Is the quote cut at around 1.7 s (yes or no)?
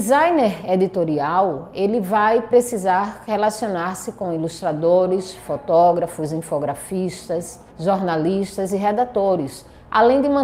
no